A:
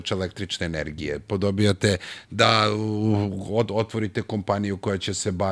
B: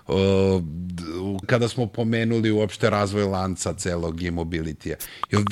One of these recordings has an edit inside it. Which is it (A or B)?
B